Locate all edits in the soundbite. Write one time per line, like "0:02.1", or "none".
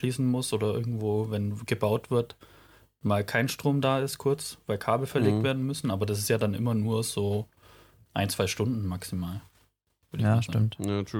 none